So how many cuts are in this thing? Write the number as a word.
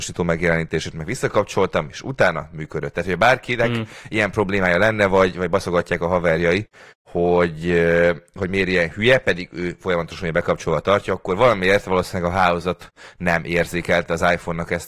zero